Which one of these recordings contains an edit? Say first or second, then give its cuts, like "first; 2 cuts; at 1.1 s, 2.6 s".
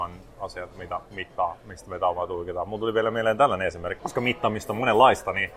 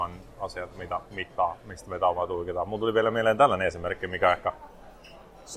first; 1 cut; at 4.0 s